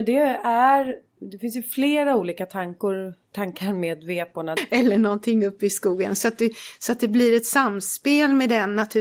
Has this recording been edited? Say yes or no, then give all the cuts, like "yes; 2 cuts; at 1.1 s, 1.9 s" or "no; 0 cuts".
yes; 2 cuts; at 1.2 s, 4.6 s